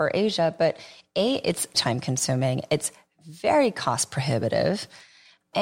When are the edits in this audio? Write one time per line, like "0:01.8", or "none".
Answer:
0:01.7